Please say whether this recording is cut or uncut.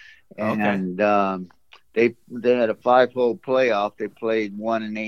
uncut